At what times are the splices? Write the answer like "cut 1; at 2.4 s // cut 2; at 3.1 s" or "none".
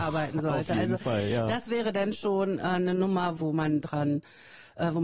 cut 1; at 3.4 s